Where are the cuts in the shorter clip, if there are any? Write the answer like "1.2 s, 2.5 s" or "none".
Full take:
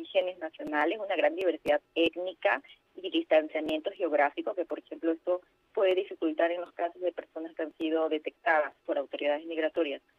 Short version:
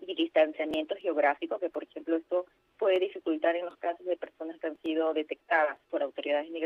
none